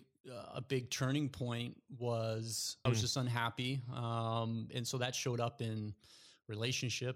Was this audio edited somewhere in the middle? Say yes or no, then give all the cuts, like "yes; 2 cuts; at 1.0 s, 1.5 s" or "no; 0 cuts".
yes; 1 cut; at 2.9 s